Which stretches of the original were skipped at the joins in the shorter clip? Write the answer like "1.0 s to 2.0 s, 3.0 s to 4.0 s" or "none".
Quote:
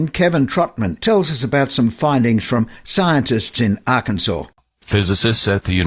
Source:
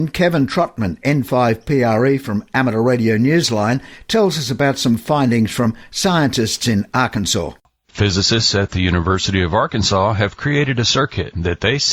1.0 s to 4.1 s